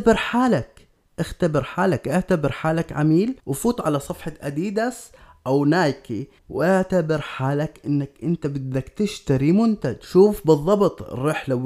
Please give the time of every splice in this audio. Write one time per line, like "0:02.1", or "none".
0:03.4
0:06.4